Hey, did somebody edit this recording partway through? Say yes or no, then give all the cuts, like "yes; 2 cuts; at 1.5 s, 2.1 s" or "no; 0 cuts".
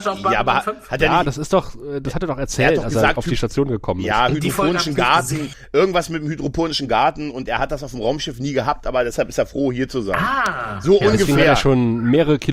no; 0 cuts